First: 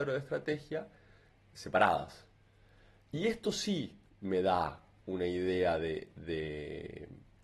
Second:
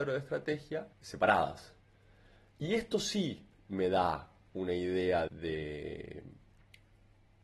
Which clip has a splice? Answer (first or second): second